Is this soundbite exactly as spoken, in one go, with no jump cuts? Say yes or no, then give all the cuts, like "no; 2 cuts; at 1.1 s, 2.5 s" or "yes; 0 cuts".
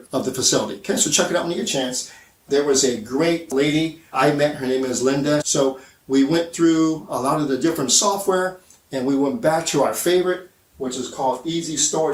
no; 3 cuts; at 2.4 s, 4.1 s, 5.4 s